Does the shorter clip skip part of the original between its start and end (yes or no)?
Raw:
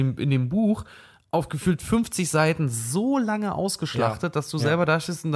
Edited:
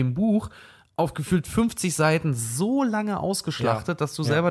no